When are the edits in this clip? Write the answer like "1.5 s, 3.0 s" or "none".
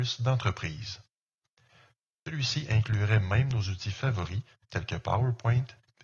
none